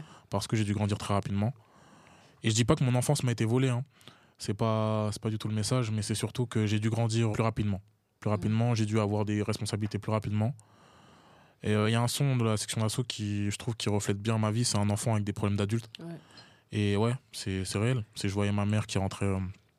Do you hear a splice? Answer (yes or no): yes